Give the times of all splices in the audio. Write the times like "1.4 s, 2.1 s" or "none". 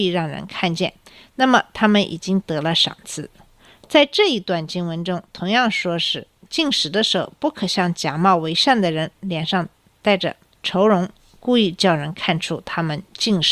none